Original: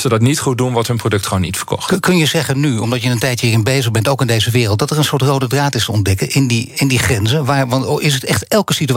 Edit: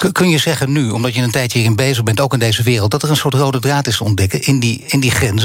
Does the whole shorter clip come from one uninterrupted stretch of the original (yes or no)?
yes